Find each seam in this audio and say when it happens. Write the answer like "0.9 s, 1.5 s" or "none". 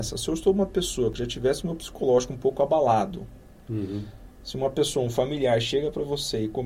none

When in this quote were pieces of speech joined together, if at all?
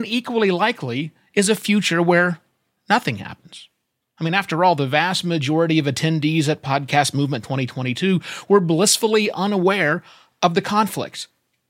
none

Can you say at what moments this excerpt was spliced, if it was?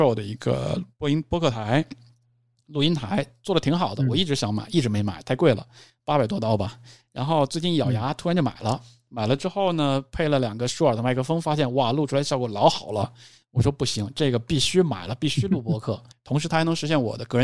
16.1 s

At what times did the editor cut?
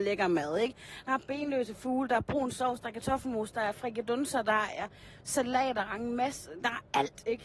none

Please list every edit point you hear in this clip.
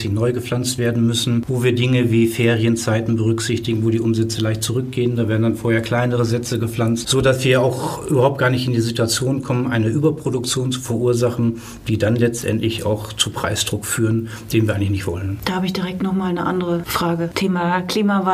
none

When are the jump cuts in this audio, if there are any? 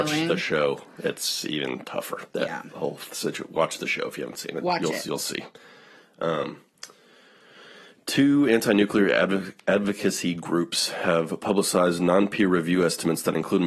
2.3 s

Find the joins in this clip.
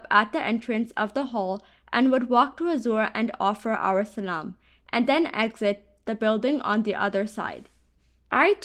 none

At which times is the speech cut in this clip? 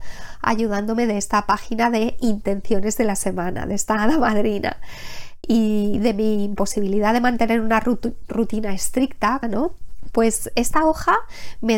5.4 s, 9.4 s

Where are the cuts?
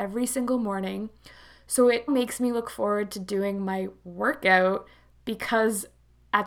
2.1 s

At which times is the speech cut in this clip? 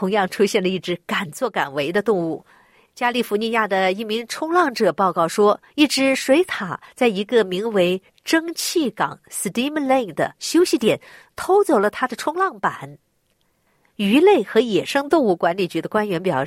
none

